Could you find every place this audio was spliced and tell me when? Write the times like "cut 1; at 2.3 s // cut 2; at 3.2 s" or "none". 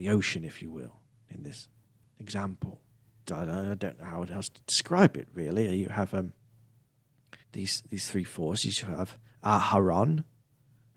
cut 1; at 3.3 s // cut 2; at 7.4 s